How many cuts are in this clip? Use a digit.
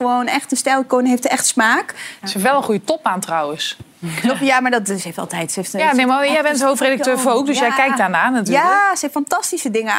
1